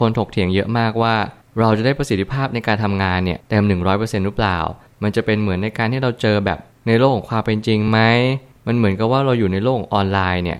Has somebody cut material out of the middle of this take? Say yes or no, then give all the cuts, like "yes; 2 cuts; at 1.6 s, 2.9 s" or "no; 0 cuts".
no; 0 cuts